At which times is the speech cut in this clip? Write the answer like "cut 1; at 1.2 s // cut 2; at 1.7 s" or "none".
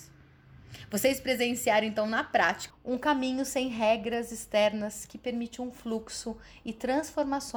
cut 1; at 2.7 s